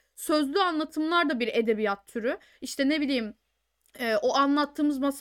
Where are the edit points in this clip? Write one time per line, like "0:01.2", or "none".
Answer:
0:02.5